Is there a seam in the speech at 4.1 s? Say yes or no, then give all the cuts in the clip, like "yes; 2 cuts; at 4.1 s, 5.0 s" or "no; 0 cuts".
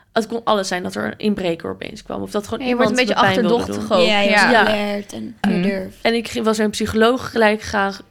no; 1 cut; at 5.4 s